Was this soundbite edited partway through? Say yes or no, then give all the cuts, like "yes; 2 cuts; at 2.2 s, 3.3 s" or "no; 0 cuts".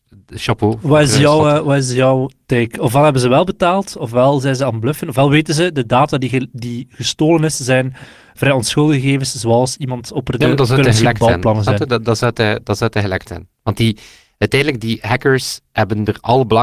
no; 0 cuts